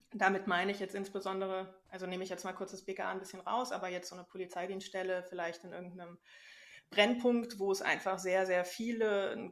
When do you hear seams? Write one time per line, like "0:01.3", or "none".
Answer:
none